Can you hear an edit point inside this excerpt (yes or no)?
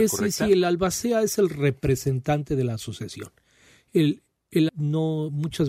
yes